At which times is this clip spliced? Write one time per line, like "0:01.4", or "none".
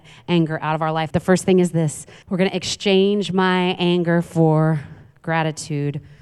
0:01.1
0:02.2